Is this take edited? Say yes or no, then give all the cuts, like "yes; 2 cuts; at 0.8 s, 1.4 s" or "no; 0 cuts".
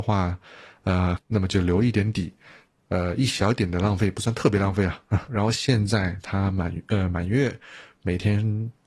yes; 2 cuts; at 1.2 s, 5.3 s